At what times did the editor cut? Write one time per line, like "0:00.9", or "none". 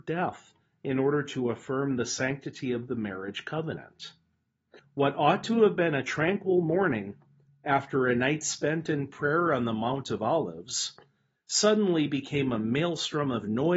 0:04.8
0:11.3